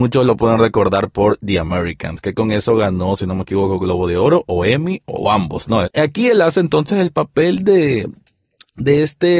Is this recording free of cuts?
no; 1 cut; at 5.8 s

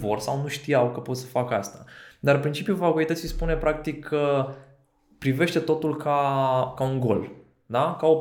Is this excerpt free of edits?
yes; 0 cuts

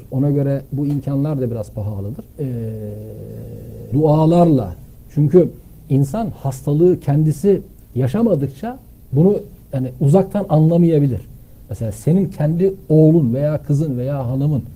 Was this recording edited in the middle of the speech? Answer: yes; 3 cuts; at 2.3 s, 3.9 s, 9.6 s

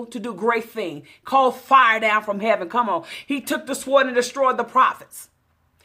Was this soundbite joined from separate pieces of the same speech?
no; 0 cuts

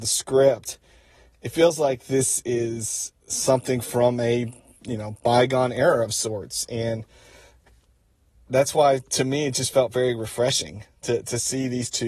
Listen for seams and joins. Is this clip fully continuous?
yes; 0 cuts

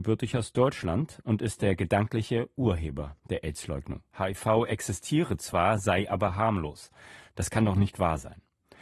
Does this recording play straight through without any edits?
no; 2 cuts; at 4.1 s, 7.3 s

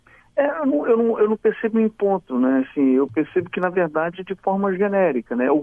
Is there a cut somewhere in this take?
no; 0 cuts

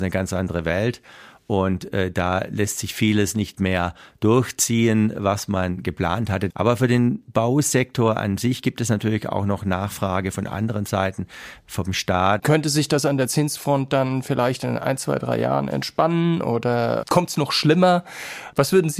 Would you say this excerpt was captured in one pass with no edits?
no; 2 cuts; at 6.5 s, 12.4 s

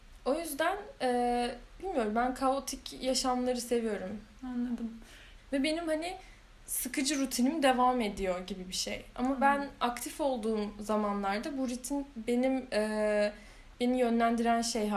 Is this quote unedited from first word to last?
no; 2 cuts; at 5.4 s, 13.7 s

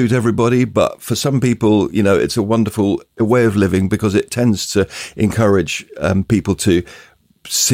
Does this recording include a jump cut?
no; 0 cuts

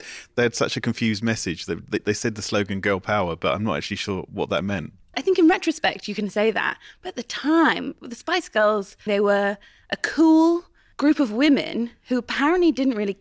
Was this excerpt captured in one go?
no; 2 cuts; at 5.1 s, 9.1 s

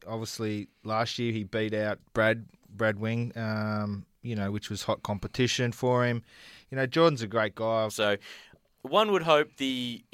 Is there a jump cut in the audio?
yes; 1 cut; at 7.9 s

